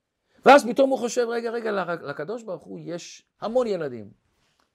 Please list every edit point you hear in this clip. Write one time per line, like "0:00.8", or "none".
none